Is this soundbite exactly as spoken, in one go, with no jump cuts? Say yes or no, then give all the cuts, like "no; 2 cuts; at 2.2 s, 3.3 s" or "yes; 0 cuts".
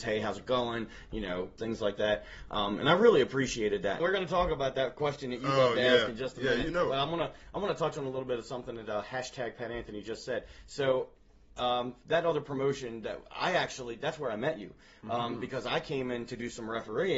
no; 2 cuts; at 1.6 s, 4.0 s